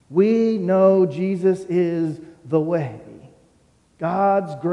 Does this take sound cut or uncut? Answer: uncut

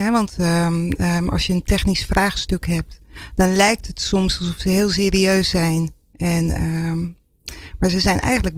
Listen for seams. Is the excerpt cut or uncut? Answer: uncut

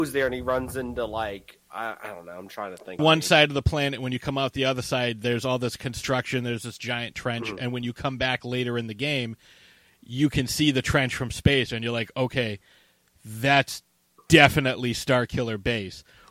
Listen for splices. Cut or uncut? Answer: cut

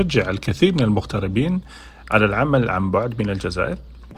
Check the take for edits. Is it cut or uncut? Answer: uncut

